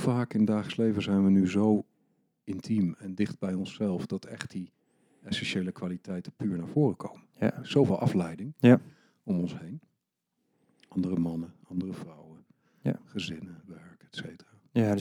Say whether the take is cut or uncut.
uncut